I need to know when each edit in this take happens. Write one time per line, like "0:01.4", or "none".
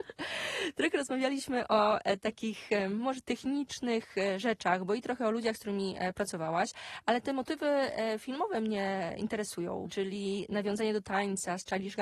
0:09.9